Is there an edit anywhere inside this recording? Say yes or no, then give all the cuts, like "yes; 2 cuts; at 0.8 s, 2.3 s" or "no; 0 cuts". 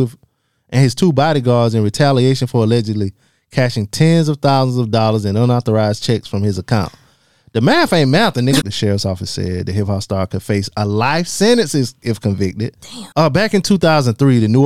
yes; 2 cuts; at 8.6 s, 13.1 s